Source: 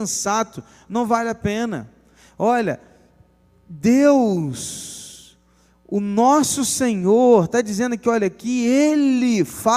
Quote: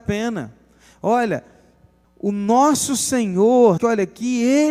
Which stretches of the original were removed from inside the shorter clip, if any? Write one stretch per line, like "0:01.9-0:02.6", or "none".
0:03.4-0:05.7
0:07.5-0:08.0

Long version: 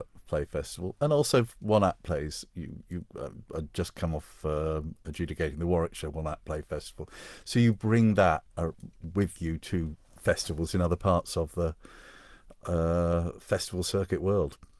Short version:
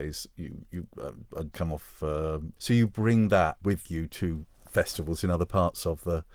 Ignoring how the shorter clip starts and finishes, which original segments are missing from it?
0:03.7-0:03.9
0:05.0-0:07.4
0:08.5-0:09.1

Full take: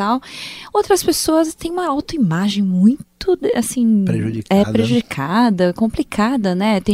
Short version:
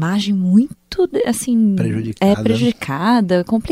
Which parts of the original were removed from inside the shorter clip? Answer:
none

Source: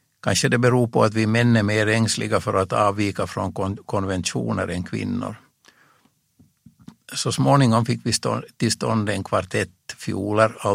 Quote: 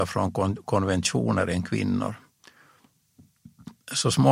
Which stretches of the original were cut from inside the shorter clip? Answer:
none

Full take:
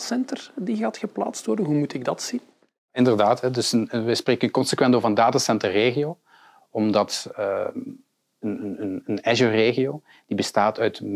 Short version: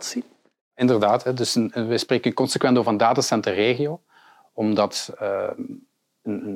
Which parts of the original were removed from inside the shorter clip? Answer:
none

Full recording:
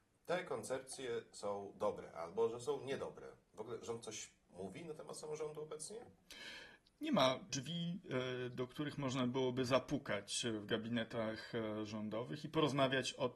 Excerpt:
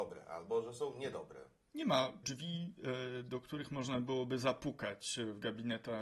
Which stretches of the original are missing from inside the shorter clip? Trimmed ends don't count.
0:03.5-0:06.9

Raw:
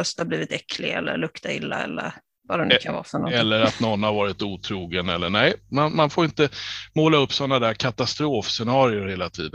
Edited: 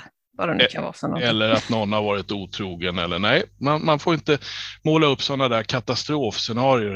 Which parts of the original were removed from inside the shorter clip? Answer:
none

